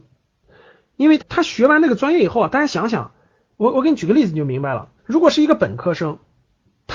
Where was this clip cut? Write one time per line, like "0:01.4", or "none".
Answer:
0:01.2
0:05.0